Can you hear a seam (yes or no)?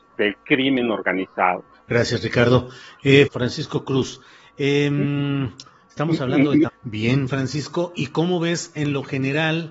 yes